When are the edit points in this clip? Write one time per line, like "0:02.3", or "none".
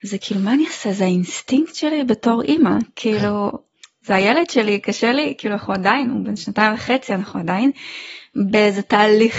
none